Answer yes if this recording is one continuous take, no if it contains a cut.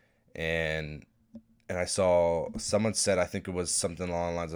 yes